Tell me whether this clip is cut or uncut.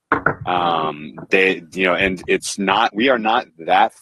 uncut